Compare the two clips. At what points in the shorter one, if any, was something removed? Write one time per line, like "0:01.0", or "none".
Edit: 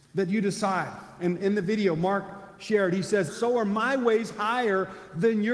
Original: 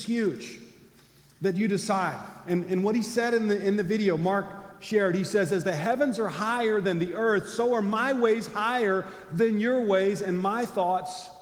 0:01.4
0:03.3

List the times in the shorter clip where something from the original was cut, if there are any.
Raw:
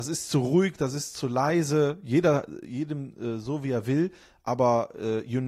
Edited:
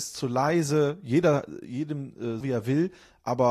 0:02.4

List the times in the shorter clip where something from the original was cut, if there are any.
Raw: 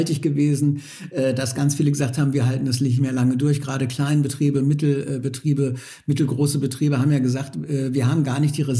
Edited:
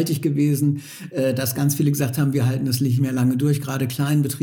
none

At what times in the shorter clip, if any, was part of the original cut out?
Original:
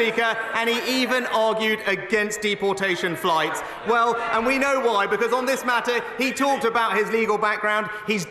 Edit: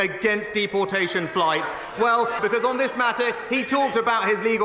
0:02.4

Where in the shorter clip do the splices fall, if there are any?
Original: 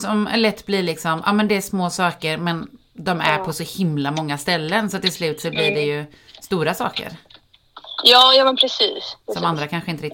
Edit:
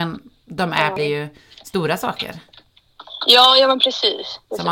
0:01.0

